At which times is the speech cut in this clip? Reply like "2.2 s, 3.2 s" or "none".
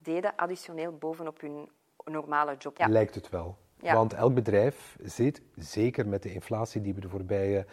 2.8 s